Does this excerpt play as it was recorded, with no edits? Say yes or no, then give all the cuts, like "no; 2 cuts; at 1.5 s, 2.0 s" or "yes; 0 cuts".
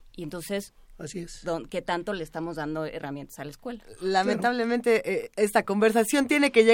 yes; 0 cuts